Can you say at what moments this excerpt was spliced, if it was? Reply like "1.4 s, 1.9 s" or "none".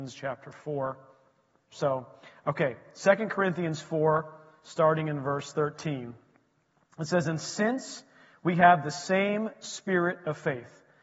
1.7 s